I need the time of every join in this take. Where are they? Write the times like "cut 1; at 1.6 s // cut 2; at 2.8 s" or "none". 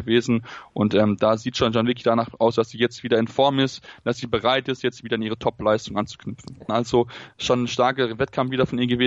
cut 1; at 6.7 s